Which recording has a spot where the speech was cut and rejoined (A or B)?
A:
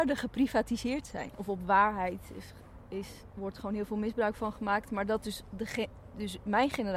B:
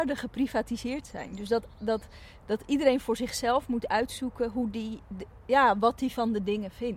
A